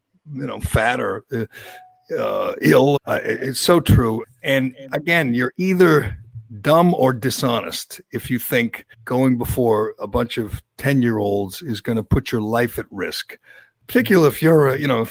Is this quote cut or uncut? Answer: cut